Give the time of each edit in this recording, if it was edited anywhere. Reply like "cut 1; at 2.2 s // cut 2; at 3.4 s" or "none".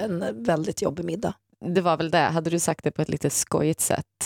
none